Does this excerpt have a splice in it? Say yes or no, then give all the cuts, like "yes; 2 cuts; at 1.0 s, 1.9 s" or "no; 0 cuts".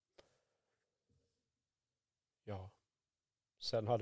no; 0 cuts